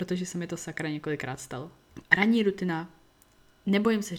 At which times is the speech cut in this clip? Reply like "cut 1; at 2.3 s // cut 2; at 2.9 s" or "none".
cut 1; at 2.0 s